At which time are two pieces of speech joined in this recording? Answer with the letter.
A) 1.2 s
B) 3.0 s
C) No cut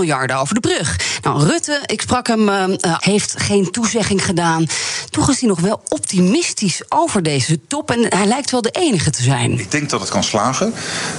B